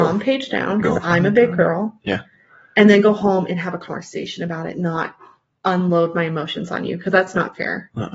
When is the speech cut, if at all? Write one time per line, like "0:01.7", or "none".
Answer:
none